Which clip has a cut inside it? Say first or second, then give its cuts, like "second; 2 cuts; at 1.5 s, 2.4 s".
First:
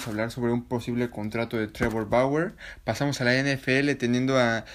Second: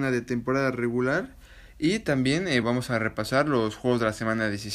second; 1 cut; at 2.6 s